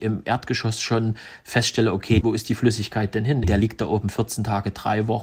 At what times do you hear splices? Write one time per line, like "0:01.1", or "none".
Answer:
0:02.2
0:03.4